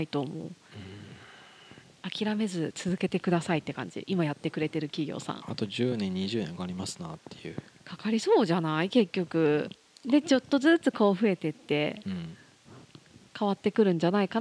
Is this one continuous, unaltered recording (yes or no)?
no